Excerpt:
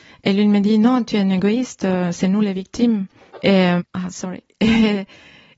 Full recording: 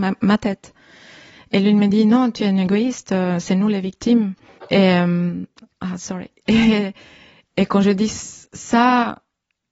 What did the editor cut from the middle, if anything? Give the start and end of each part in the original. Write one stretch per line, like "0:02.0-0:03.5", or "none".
0:05.1-0:05.7